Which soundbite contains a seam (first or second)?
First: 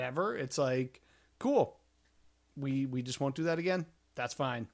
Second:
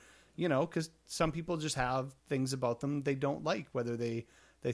second